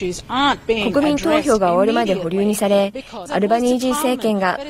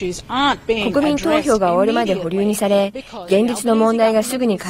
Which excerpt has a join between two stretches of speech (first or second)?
first